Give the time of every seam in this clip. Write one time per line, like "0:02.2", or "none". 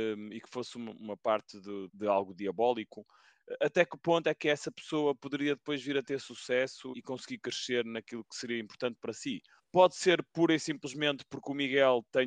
0:01.9
0:06.9
0:09.6